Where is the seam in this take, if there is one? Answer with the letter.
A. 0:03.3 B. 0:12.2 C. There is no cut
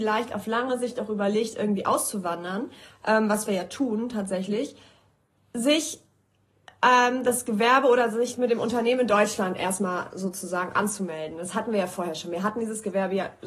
C